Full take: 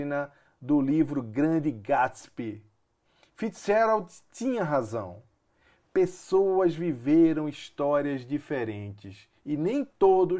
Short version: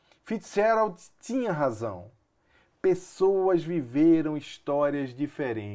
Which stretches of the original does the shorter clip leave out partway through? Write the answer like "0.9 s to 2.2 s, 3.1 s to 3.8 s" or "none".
none